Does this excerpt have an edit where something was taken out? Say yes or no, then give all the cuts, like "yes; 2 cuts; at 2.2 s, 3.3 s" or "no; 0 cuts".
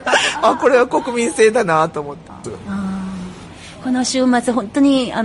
yes; 1 cut; at 2.4 s